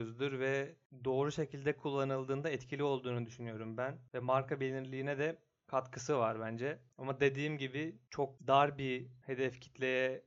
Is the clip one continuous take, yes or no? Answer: no